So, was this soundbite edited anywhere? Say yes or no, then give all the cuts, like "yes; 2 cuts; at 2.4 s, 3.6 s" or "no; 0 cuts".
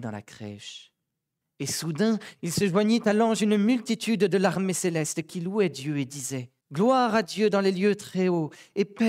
yes; 2 cuts; at 1.4 s, 6.6 s